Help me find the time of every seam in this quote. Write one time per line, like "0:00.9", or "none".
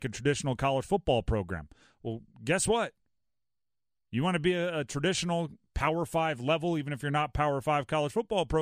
0:02.3